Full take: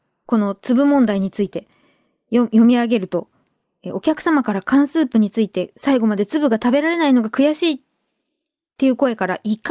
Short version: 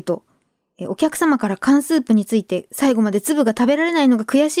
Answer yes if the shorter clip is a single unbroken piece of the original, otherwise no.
yes